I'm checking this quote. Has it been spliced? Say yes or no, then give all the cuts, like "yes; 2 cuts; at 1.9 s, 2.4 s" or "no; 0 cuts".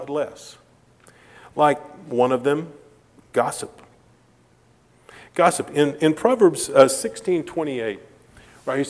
no; 0 cuts